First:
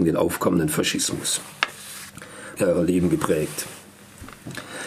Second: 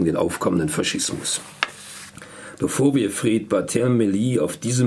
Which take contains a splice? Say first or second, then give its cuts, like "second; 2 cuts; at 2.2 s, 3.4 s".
first; 1 cut; at 2.6 s